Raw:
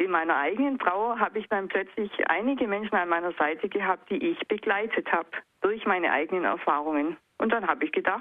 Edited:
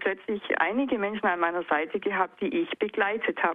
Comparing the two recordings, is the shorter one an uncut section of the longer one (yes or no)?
yes